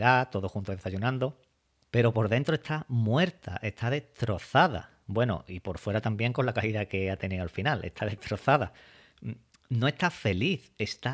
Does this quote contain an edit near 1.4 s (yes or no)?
no